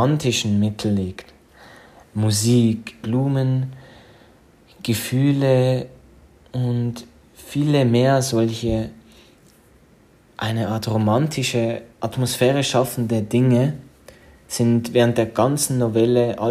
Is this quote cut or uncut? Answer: cut